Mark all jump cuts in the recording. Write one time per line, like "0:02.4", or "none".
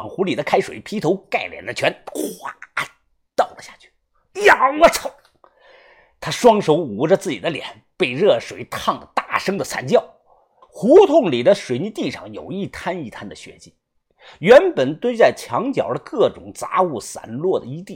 0:10.6